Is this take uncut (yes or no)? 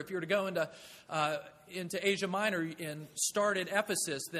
yes